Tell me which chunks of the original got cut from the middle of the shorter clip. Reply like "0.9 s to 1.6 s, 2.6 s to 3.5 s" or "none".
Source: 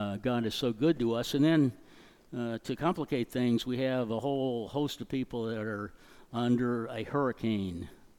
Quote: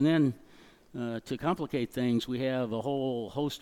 none